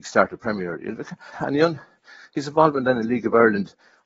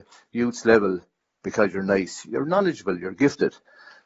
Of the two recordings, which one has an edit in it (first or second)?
first